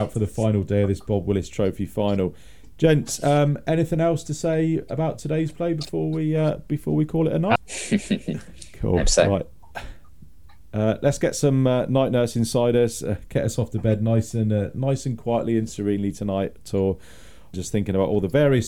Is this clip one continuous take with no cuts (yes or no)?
no